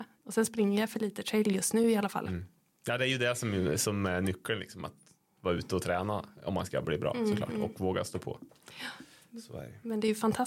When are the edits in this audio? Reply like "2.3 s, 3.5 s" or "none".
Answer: none